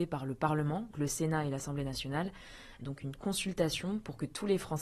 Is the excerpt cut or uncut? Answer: cut